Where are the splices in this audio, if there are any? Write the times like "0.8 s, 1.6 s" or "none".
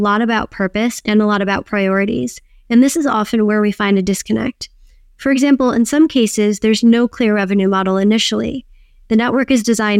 none